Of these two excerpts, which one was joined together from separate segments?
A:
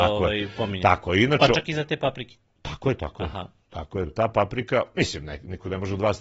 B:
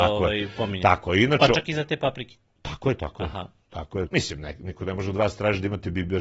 B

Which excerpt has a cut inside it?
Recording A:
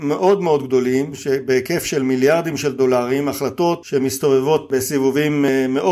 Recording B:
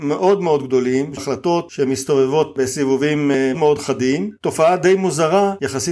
B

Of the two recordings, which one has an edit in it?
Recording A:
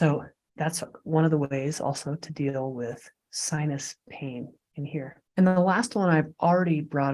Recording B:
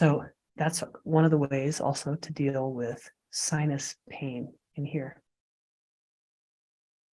A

